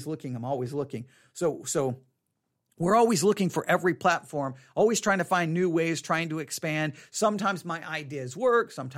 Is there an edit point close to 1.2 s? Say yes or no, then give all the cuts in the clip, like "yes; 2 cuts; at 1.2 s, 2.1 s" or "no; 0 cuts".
no; 0 cuts